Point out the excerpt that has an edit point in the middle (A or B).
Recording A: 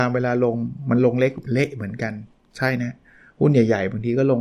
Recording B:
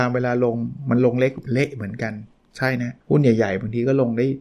B